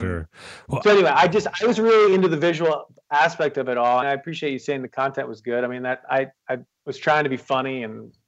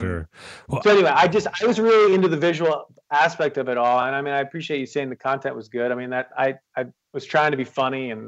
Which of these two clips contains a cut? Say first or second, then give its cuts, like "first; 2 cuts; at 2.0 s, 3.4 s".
first; 1 cut; at 4.0 s